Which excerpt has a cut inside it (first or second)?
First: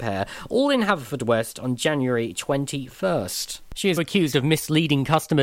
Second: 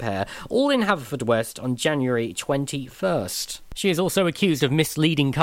first